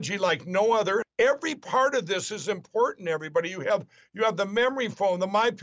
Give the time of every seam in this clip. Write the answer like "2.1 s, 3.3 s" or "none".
1.0 s

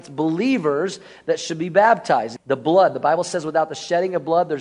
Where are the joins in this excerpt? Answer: 2.4 s

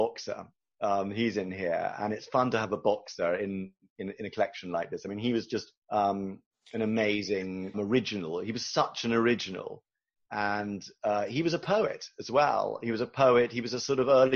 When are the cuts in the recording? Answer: 5.8 s, 7.7 s

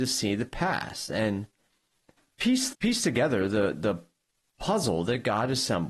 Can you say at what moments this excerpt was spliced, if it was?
2.7 s

